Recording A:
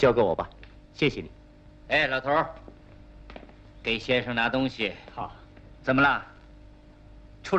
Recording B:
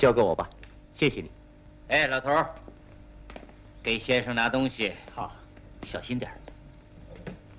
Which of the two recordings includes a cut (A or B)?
A